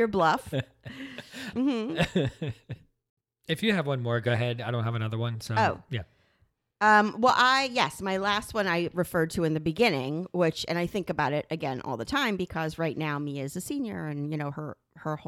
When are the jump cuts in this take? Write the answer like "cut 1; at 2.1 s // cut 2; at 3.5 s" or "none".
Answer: cut 1; at 1.5 s